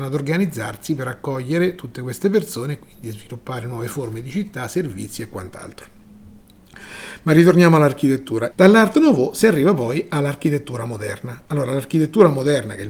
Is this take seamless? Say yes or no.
no